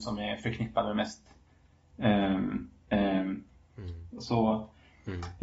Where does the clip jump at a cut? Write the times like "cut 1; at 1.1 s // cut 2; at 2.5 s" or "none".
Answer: cut 1; at 2.9 s // cut 2; at 4.1 s